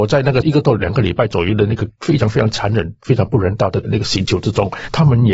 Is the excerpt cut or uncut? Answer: uncut